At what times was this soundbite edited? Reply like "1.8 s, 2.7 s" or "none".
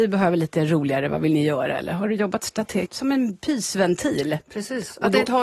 2.9 s